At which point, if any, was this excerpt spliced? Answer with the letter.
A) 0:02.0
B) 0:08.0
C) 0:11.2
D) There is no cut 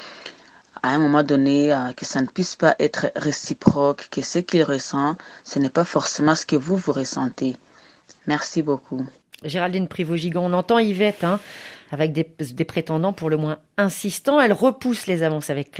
D